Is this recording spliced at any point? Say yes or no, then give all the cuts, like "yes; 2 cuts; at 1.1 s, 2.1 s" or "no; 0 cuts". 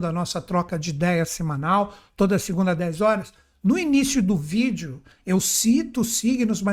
no; 0 cuts